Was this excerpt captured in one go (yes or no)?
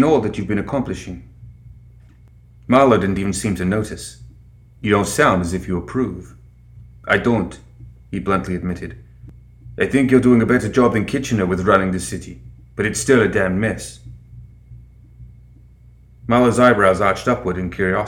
yes